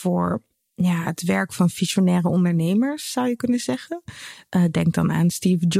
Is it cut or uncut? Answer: uncut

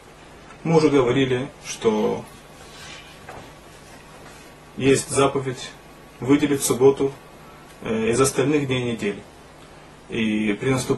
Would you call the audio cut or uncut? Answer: uncut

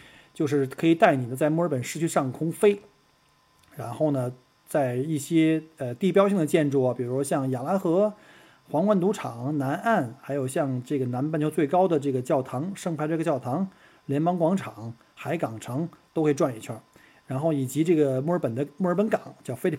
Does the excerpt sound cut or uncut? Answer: uncut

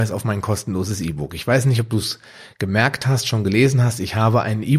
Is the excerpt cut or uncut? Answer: uncut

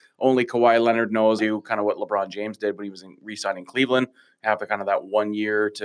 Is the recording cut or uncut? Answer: cut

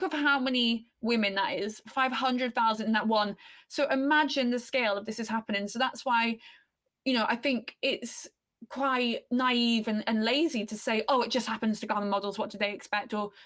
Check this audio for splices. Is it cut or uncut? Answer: uncut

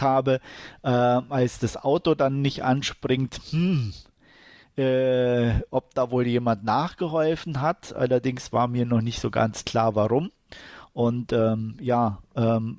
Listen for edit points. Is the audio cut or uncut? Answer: uncut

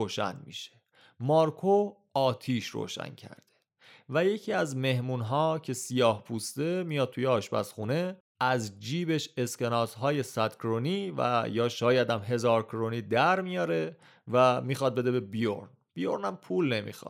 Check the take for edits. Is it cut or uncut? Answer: uncut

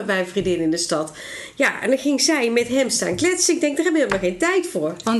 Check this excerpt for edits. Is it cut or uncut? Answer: uncut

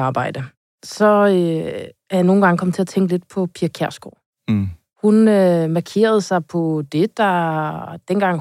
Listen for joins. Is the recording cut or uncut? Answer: uncut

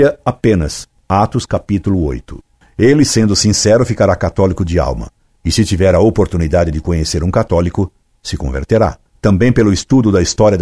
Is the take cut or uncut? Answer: uncut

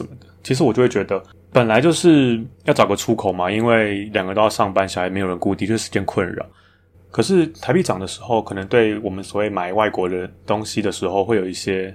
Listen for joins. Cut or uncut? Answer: cut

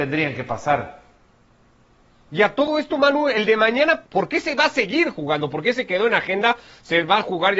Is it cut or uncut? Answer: cut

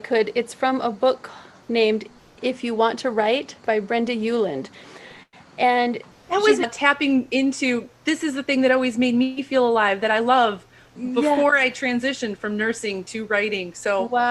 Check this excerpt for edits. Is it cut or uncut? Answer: cut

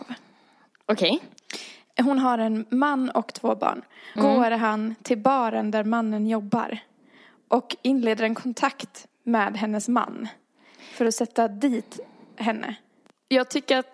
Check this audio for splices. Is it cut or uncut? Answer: cut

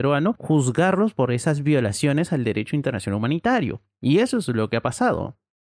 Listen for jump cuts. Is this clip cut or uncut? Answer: uncut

